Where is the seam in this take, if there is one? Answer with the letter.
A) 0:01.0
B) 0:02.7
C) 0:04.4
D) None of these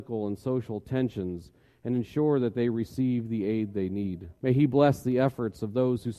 C